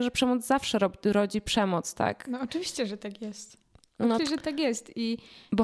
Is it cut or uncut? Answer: cut